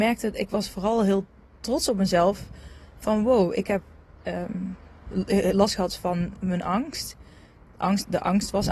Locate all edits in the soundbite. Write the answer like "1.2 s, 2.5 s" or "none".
4.2 s